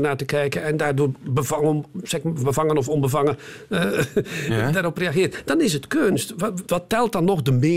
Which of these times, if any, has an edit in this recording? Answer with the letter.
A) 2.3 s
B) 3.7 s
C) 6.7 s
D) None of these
C